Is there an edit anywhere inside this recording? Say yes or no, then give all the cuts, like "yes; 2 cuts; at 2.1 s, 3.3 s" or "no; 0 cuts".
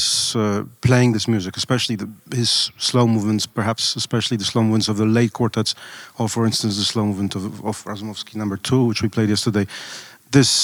no; 0 cuts